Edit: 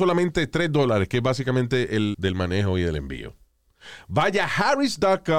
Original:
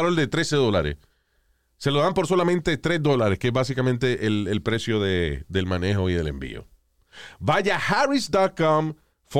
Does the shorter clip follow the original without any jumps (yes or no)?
no